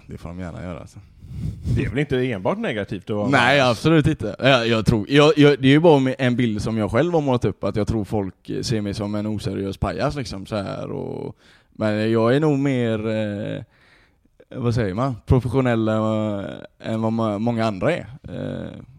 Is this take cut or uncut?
uncut